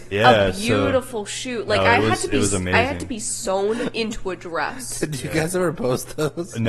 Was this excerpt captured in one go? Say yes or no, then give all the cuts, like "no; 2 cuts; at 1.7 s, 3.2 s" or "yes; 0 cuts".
yes; 0 cuts